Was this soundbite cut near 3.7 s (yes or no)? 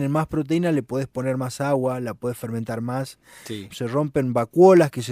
yes